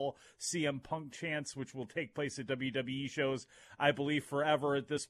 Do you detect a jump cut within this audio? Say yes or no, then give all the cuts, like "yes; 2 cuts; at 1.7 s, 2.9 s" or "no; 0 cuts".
no; 0 cuts